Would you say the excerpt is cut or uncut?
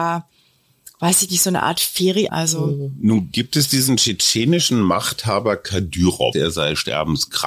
cut